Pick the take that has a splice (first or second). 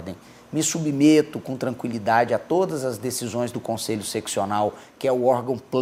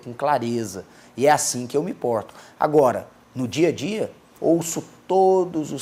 second